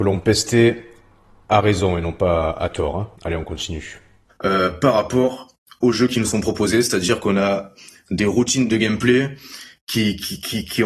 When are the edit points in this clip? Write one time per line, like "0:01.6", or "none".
0:03.2